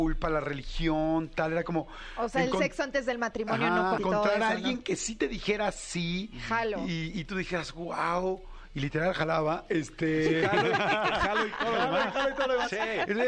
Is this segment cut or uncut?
cut